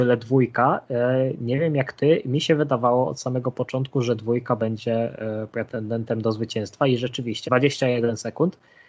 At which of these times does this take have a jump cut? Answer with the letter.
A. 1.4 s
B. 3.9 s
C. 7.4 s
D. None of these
C